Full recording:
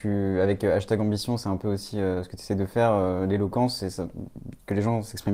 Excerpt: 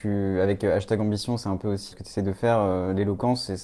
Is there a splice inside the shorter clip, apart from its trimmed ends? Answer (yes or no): yes